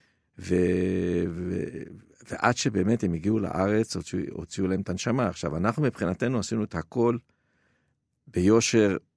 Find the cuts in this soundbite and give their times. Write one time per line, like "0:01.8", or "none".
none